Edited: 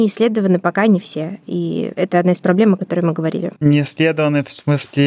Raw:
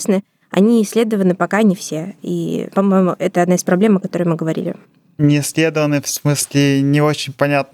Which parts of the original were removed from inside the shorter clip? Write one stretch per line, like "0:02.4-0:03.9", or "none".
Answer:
0:02.7-0:03.2
0:04.8-0:05.1

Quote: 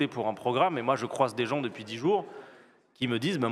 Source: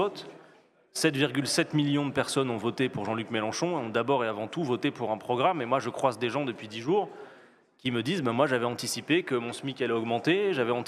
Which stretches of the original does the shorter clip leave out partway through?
none

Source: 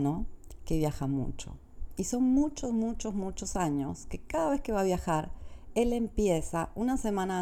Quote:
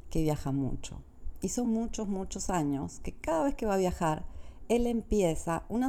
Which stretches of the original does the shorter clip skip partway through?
0:02.2-0:02.7

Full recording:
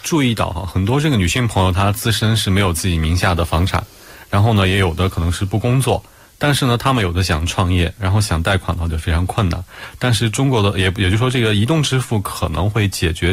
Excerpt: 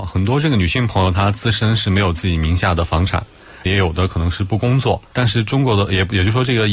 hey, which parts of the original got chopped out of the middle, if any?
0:04.3-0:04.7
0:06.1-0:10.0

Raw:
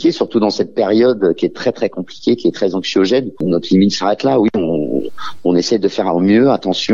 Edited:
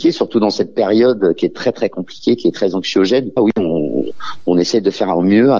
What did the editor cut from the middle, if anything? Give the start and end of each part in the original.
0:03.4-0:04.3

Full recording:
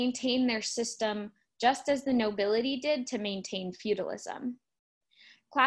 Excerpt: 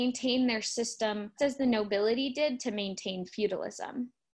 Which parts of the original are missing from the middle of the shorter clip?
0:01.4-0:01.8

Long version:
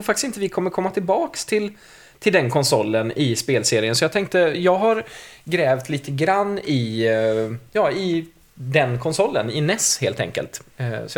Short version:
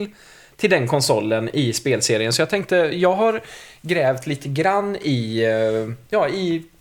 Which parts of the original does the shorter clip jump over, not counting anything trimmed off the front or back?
none

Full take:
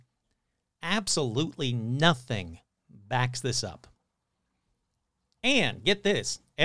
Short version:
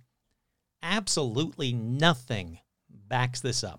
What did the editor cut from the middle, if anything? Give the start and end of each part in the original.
none

